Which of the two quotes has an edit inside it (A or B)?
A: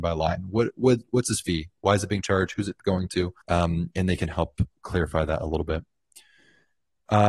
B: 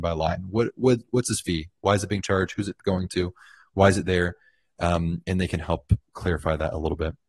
A